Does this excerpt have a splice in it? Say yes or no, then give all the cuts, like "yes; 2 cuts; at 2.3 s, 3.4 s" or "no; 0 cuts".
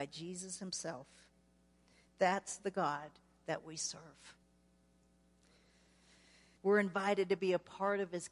yes; 2 cuts; at 2.0 s, 6.6 s